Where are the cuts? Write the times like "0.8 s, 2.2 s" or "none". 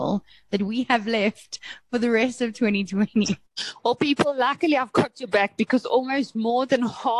3.5 s